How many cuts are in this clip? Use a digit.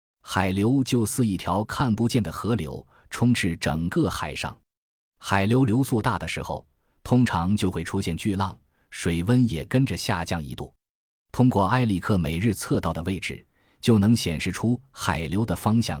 0